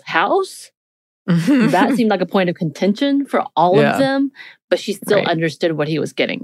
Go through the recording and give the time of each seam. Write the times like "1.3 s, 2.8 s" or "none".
none